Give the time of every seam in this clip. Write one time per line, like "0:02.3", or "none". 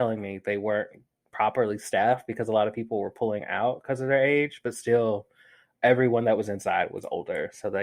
none